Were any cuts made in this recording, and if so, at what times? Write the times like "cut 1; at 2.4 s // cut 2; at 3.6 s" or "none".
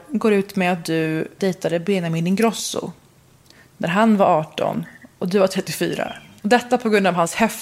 cut 1; at 1.4 s // cut 2; at 6.4 s